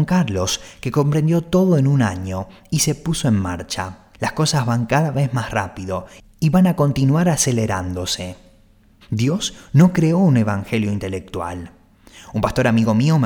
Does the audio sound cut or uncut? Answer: cut